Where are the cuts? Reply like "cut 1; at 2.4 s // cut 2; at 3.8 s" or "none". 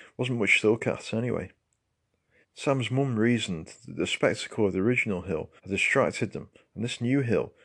cut 1; at 2.4 s // cut 2; at 5.6 s